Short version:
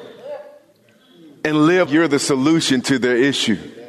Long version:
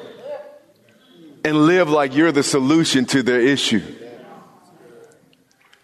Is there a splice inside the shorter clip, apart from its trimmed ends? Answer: yes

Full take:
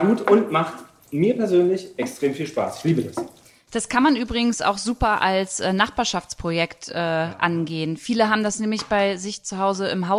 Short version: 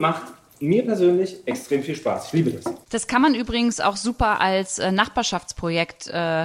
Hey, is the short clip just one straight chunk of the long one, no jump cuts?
no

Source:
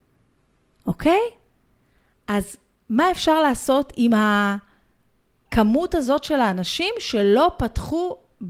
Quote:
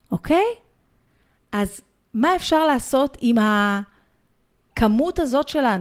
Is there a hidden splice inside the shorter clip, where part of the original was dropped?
no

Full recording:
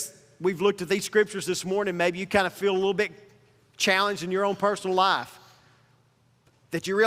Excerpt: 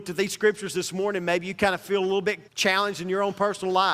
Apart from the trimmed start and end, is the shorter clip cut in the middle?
yes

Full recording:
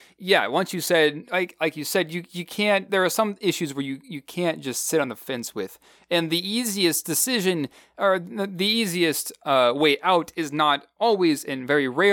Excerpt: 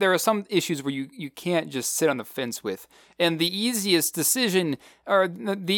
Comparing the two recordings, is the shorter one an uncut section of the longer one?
yes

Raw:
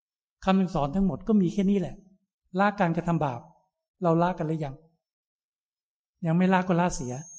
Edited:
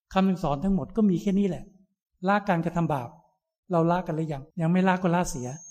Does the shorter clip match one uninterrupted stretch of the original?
no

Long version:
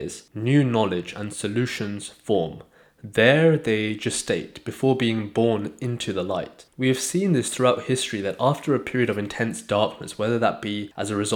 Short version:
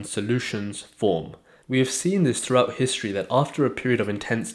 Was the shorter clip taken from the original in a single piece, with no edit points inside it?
no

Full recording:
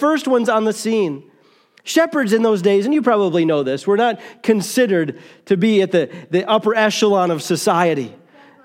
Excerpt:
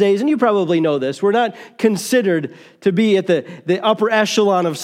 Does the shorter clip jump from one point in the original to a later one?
no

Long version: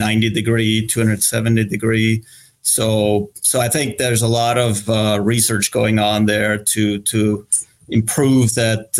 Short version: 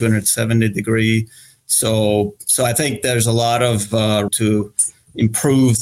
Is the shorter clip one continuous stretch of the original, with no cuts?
no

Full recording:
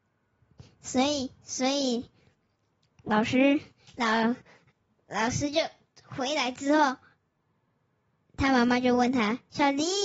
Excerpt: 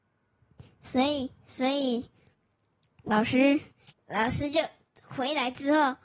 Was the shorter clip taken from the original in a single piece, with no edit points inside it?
no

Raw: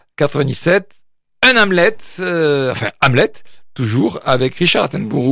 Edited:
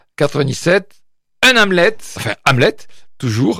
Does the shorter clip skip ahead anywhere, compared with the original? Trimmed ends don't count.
yes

